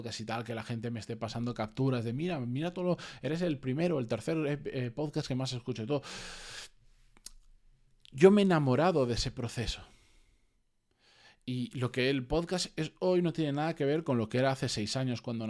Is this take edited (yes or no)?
no